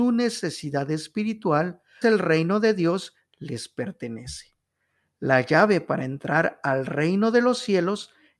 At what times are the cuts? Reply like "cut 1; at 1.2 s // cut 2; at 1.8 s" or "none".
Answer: cut 1; at 2.0 s